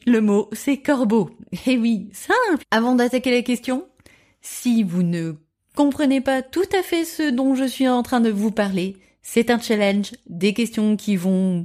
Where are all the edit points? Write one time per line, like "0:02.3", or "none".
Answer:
0:02.6